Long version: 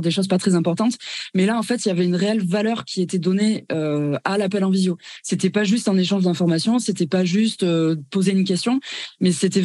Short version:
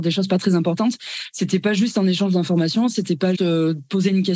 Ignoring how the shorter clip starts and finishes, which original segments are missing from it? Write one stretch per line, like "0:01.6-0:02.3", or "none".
0:01.3-0:05.2
0:07.3-0:07.6